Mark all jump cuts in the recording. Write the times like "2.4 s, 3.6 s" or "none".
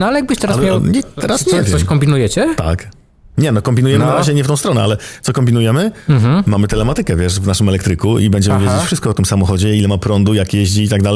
none